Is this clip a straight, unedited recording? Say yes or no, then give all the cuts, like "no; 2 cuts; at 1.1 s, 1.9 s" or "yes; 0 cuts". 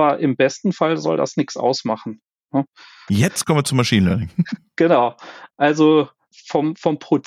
no; 1 cut; at 3.1 s